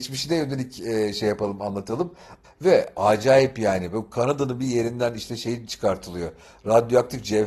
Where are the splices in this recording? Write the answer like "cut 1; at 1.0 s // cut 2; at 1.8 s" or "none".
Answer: cut 1; at 2.4 s